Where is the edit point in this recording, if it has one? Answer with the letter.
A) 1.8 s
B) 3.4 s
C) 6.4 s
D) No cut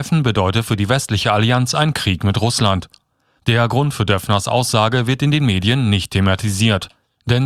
B